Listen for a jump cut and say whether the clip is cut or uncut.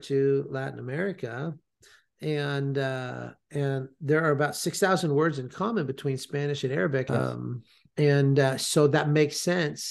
cut